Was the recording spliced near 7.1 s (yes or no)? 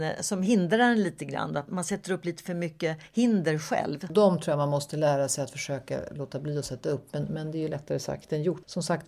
no